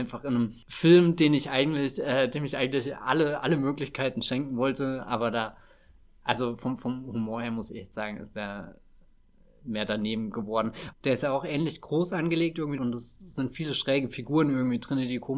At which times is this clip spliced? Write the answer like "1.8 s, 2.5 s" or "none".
10.9 s, 12.8 s